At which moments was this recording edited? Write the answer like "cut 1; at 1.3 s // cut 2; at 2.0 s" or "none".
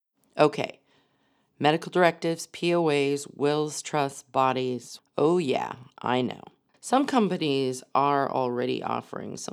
cut 1; at 5.0 s // cut 2; at 6.7 s